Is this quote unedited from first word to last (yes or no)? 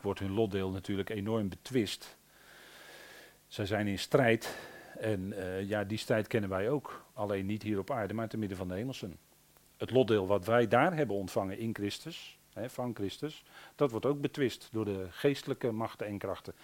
yes